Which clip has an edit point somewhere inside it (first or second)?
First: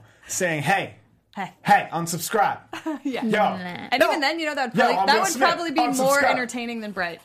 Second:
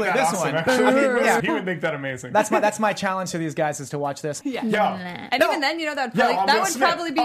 second